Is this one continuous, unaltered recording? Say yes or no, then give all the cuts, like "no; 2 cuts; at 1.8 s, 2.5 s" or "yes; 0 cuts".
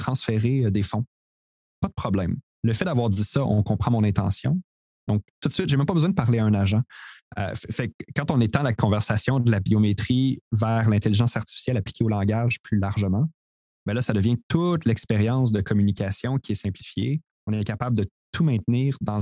no; 1 cut; at 4.9 s